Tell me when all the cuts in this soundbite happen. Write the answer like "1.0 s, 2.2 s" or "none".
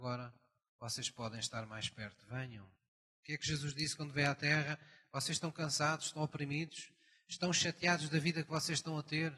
none